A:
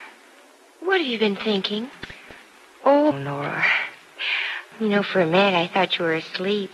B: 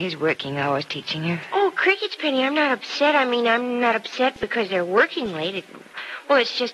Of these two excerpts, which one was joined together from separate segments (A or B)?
A